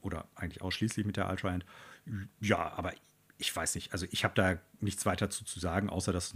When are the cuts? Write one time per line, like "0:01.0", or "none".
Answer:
none